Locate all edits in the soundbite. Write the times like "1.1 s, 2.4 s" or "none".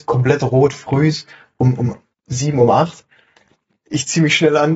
none